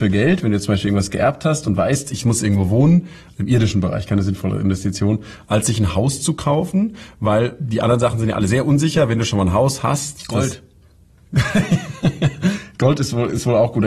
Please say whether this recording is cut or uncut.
uncut